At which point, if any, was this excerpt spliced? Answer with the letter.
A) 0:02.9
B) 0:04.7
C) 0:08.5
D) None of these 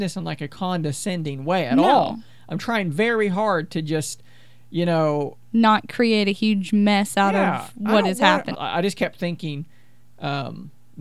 C